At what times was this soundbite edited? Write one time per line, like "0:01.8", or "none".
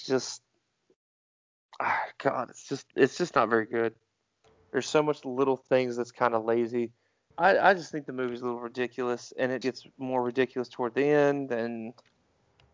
0:07.3
0:09.6

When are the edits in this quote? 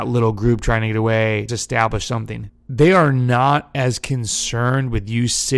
0:01.5
0:02.5

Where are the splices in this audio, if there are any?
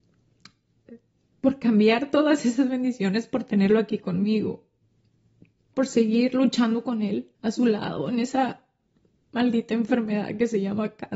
0:05.7
0:07.3

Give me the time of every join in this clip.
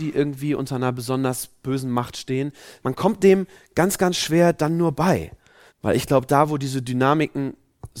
0:02.8
0:05.7

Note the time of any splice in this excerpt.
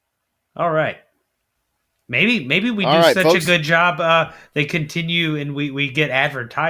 none

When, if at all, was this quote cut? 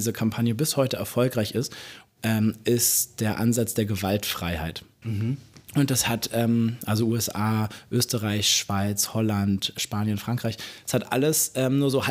0:05.0

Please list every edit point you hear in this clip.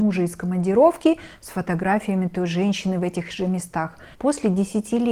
0:04.1

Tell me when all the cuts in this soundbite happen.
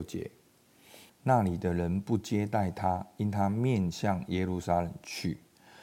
0:01.1

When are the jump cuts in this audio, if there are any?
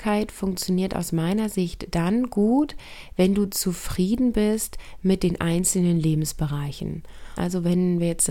0:07.4

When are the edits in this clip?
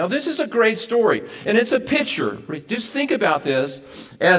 none

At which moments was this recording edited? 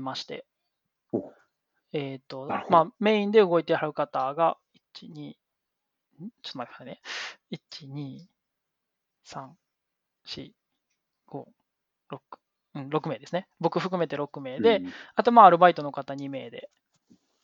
none

